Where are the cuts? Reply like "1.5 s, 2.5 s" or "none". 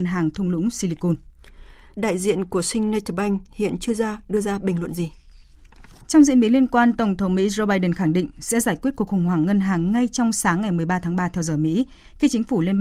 1.9 s